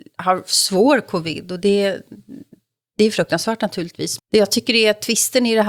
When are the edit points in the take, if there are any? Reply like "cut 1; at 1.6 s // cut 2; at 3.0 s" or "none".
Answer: cut 1; at 4.2 s